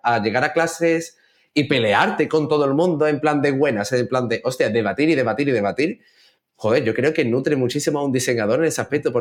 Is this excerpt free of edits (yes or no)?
yes